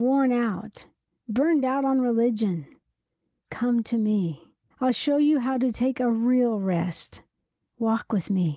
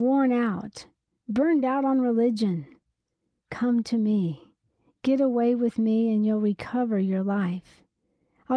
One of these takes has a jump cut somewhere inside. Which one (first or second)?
first